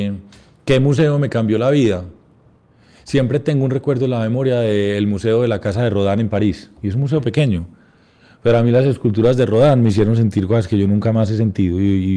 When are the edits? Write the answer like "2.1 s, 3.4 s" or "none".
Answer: none